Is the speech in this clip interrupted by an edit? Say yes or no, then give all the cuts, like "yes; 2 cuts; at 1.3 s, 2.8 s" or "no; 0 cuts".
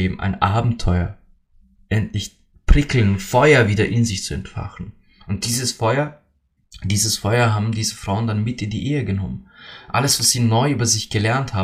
no; 0 cuts